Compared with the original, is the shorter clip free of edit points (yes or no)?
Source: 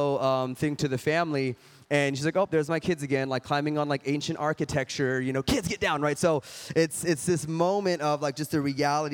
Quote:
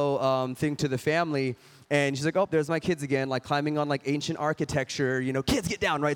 yes